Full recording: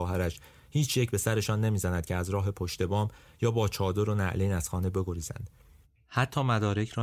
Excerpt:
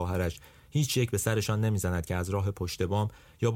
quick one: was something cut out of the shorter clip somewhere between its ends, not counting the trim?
no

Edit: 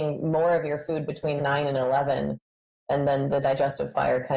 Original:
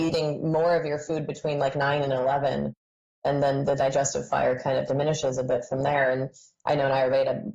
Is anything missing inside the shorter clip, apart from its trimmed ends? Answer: yes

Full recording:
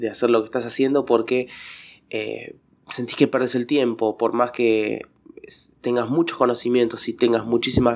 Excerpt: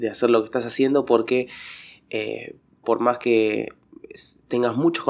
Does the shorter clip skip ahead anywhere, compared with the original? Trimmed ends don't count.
yes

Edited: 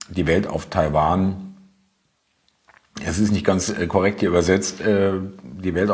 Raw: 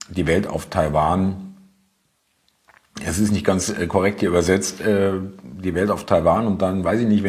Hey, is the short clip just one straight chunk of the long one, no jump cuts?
yes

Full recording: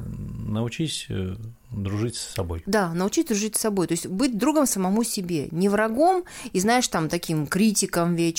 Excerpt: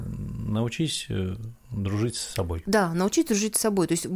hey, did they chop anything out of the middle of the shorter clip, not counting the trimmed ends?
no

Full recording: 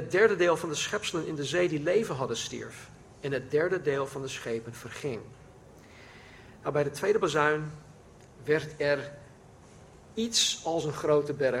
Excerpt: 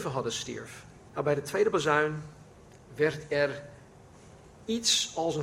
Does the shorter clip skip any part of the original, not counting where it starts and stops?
yes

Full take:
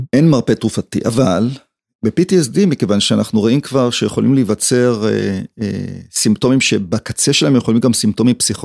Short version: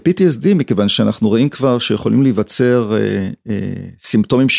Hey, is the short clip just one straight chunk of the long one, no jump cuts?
yes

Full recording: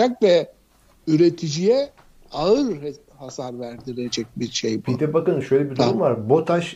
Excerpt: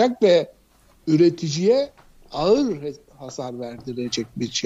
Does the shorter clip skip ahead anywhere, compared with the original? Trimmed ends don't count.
no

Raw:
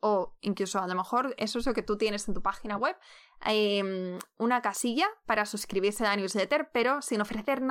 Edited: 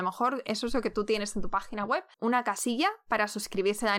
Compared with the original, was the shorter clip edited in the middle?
yes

